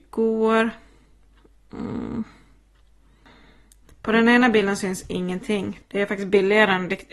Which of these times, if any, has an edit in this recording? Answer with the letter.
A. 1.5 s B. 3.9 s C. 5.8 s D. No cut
C